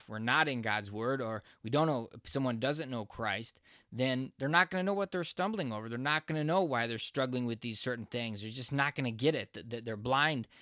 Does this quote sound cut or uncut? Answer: uncut